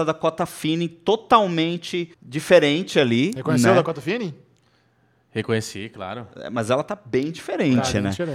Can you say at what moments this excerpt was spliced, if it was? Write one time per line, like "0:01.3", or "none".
0:02.1